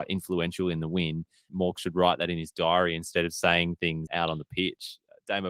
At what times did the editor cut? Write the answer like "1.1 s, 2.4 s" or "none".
1.5 s, 4.1 s